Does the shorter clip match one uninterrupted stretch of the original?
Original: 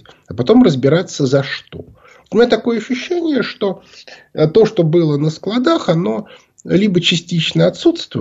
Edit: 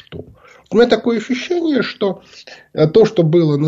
yes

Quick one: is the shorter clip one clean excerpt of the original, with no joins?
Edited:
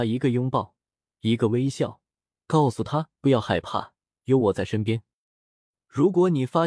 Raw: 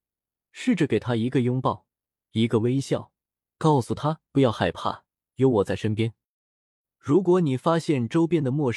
yes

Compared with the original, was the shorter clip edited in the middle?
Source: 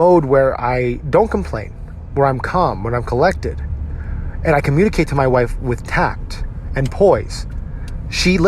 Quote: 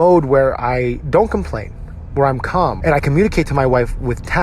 yes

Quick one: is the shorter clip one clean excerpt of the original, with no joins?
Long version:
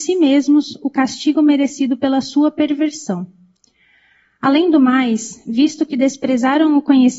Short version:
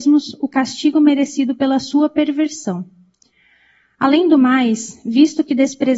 yes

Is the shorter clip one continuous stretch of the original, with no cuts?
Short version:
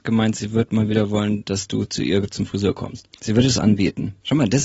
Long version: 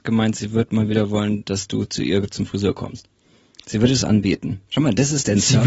no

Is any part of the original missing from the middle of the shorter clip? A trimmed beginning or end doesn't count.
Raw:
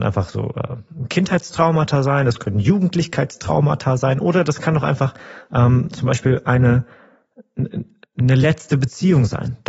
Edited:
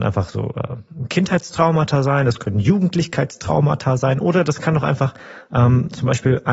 no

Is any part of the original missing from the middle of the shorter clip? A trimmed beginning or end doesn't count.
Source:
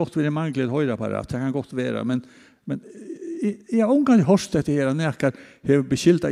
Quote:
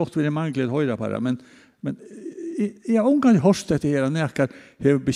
yes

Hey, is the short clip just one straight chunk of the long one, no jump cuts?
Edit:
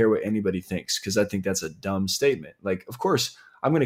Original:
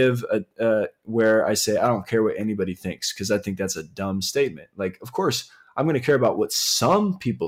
yes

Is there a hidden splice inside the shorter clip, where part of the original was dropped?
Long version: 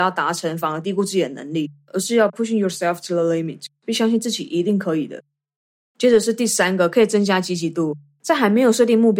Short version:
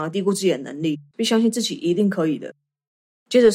yes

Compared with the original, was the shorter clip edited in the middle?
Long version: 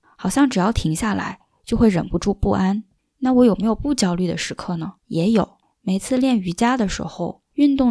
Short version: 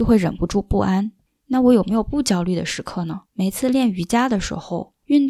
yes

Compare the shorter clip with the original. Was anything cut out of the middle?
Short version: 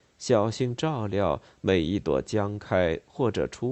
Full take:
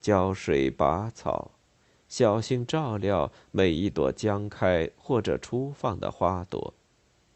no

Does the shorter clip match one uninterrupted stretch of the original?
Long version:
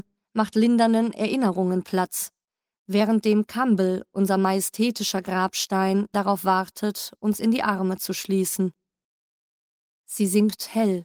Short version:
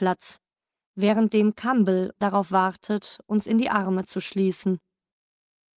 no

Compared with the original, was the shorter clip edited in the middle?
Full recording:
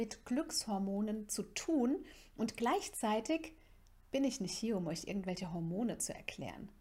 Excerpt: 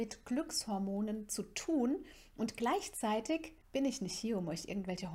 yes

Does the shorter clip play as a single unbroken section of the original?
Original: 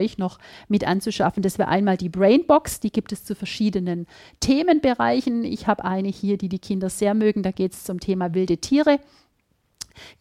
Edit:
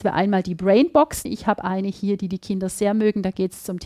no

